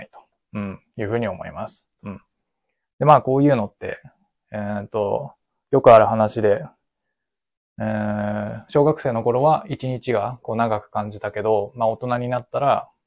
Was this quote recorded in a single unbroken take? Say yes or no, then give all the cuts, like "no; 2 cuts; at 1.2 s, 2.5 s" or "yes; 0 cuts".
yes; 0 cuts